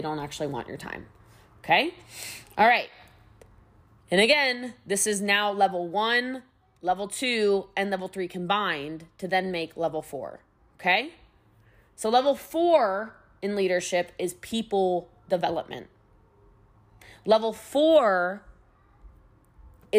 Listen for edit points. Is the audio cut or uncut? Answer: uncut